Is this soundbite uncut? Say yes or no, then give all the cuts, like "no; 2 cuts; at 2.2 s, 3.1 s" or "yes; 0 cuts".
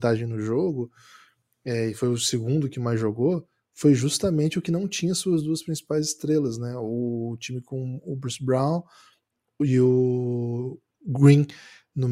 no; 1 cut; at 10.9 s